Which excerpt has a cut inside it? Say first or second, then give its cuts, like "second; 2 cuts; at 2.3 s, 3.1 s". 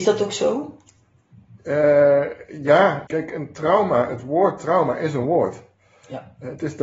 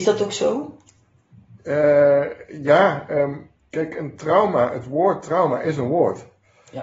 first; 1 cut; at 3.1 s